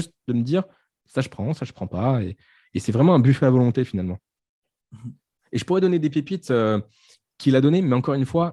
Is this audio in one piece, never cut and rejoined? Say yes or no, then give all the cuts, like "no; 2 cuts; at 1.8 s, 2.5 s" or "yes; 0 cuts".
yes; 0 cuts